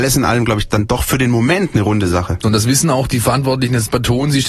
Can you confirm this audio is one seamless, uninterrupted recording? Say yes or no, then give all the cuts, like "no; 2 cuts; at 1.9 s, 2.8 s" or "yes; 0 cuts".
no; 1 cut; at 2.4 s